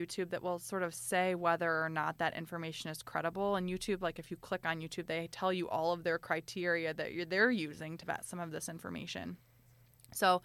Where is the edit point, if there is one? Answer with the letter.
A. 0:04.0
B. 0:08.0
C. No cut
B